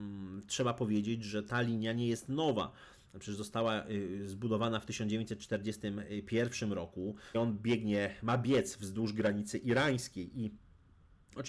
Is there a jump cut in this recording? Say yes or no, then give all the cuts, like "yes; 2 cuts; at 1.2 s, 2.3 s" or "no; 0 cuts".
yes; 1 cut; at 7.3 s